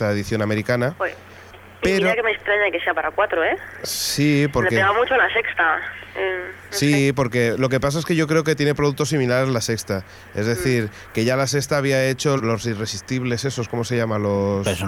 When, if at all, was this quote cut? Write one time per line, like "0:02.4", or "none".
0:12.4